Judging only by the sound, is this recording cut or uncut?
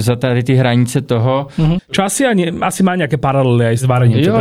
cut